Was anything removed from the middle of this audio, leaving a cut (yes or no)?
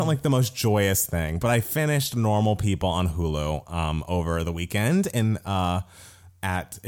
no